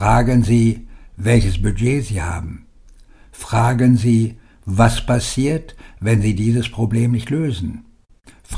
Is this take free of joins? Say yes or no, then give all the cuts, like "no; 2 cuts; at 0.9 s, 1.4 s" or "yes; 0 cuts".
yes; 0 cuts